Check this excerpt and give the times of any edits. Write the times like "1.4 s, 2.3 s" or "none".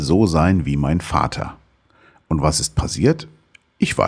none